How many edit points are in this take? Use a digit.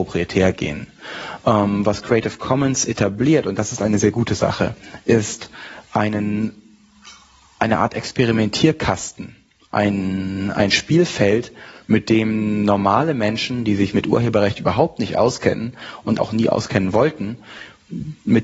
1